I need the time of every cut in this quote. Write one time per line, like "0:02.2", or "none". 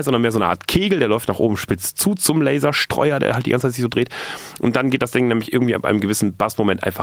none